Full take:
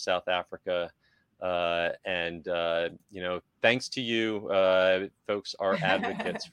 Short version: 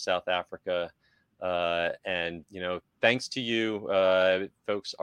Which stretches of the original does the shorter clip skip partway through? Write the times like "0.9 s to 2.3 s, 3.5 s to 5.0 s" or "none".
2.4 s to 3.0 s